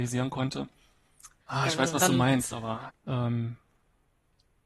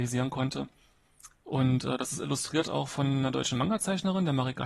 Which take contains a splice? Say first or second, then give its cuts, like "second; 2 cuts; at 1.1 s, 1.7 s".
first; 2 cuts; at 1.4 s, 2.9 s